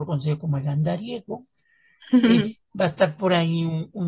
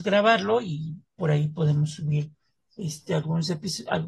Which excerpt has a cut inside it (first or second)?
first